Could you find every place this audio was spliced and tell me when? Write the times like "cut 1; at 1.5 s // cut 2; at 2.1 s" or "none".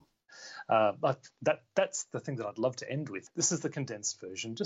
none